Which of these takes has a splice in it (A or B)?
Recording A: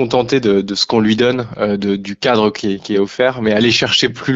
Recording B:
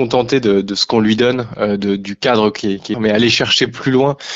B